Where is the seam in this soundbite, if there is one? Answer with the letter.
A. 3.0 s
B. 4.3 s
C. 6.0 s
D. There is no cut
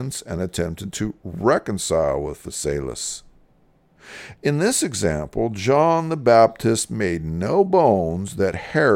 B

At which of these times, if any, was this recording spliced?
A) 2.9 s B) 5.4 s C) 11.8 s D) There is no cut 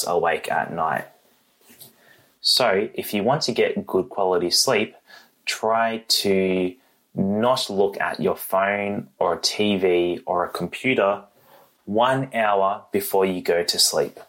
D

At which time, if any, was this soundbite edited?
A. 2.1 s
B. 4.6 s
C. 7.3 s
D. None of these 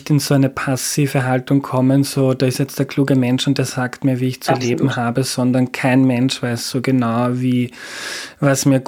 D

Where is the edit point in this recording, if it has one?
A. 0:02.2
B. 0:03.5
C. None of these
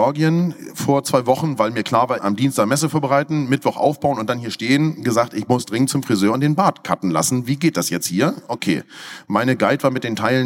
A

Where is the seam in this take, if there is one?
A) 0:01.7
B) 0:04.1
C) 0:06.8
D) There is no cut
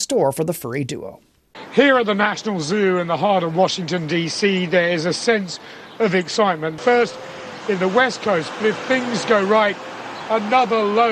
C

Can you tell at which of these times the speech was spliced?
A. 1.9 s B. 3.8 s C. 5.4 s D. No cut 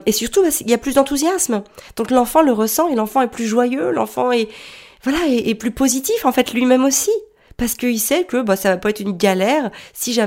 D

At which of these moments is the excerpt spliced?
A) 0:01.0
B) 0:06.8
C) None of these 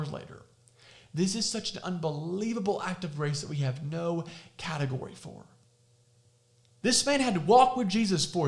B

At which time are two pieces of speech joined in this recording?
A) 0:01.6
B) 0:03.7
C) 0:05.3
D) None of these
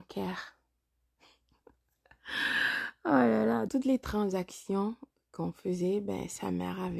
B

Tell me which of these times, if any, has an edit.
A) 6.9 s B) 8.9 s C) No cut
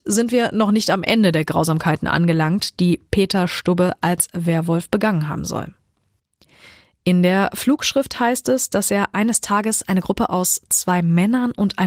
C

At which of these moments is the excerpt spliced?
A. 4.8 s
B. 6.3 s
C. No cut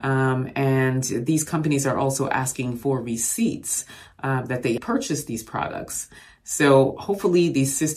A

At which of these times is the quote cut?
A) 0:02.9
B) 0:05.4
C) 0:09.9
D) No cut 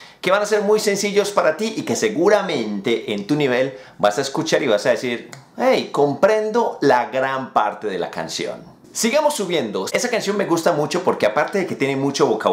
C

